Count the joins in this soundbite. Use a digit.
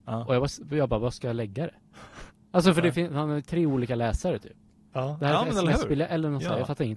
0